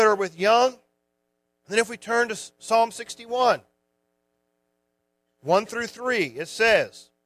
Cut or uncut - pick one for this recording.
uncut